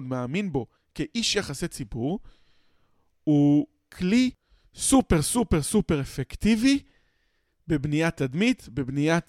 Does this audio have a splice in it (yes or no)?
no